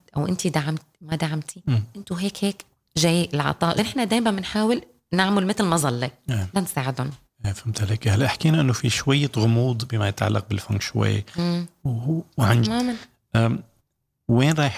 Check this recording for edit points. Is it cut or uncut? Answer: cut